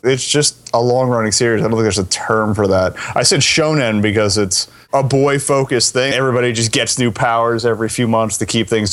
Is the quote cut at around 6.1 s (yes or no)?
yes